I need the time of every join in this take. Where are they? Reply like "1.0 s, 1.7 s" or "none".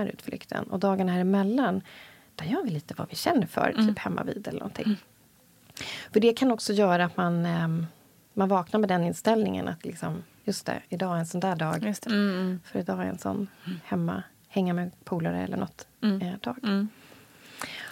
12.0 s